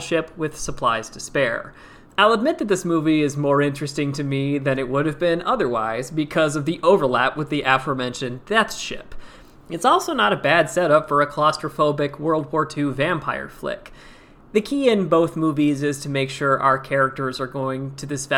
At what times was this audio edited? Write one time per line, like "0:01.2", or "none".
0:02.0
0:09.5